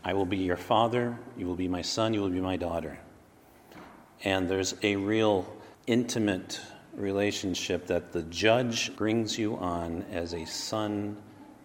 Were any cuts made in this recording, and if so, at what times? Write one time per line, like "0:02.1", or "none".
0:05.7
0:09.0